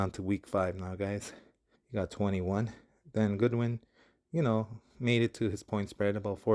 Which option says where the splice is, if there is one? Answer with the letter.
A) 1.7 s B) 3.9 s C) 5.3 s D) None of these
A